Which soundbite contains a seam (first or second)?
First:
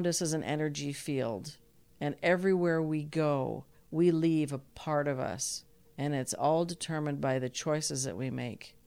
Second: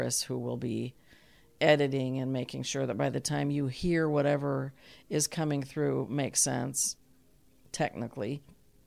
first